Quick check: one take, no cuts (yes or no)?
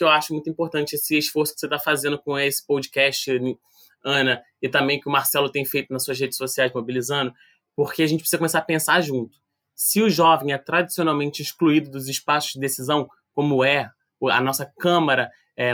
yes